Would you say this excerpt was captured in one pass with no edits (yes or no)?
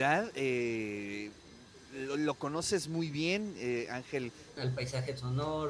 no